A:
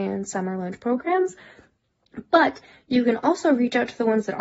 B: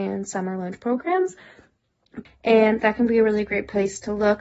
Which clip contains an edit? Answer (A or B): B